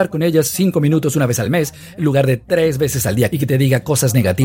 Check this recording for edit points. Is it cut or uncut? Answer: cut